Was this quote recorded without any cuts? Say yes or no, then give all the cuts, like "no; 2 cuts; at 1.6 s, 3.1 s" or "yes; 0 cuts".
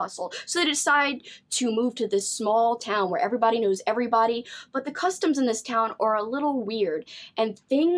yes; 0 cuts